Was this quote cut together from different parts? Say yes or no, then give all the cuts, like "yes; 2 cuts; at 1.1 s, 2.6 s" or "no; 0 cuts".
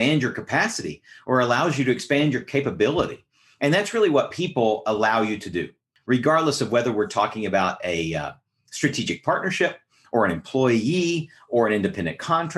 no; 0 cuts